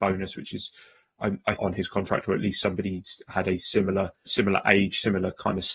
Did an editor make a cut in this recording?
yes; 2 cuts; at 1.6 s, 4.3 s

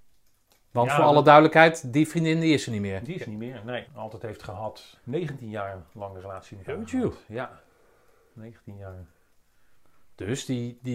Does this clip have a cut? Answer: yes; 2 cuts; at 3.9 s, 4.9 s

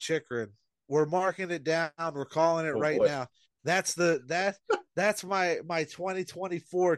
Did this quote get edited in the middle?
no; 0 cuts

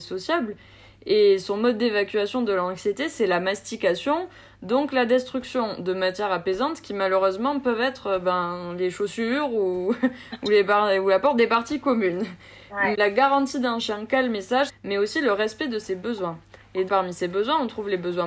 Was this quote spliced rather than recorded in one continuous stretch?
yes; 3 cuts; at 12.9 s, 14.7 s, 16.9 s

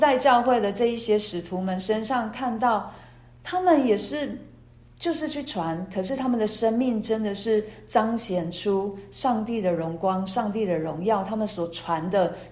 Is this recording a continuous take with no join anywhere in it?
yes; 0 cuts

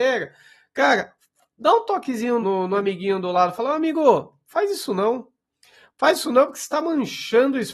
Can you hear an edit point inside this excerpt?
yes; 1 cut; at 2.4 s

